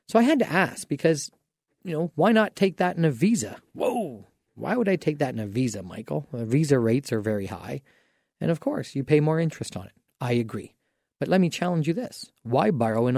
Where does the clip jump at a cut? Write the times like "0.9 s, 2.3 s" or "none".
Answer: none